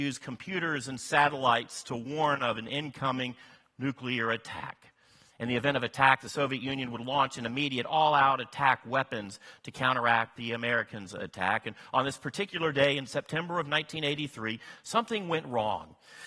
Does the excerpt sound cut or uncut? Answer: uncut